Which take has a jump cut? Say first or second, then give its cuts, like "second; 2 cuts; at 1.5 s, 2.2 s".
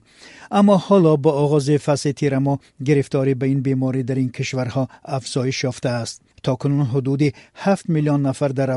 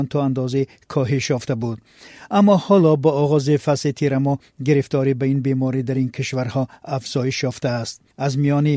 first; 1 cut; at 6.4 s